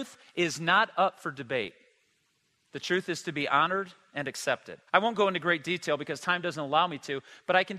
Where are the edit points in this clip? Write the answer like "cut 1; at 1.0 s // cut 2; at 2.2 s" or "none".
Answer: cut 1; at 4.9 s